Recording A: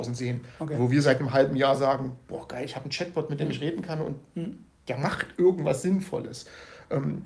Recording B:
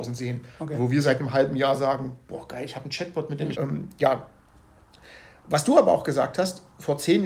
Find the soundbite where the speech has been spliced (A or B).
B